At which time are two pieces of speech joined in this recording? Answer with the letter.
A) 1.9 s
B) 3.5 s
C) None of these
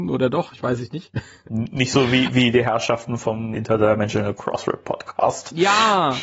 B